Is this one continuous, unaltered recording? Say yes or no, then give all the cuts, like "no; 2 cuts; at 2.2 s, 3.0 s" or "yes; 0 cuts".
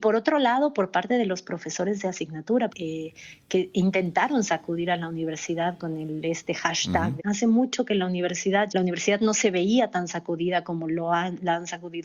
no; 3 cuts; at 2.7 s, 7.2 s, 8.7 s